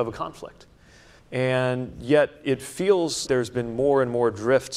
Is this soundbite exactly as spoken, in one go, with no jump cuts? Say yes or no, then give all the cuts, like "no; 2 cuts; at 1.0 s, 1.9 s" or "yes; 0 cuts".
no; 2 cuts; at 1.2 s, 3.3 s